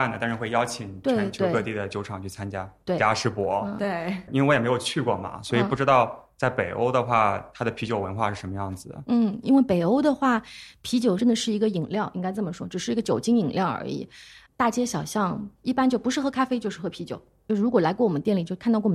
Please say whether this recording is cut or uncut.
cut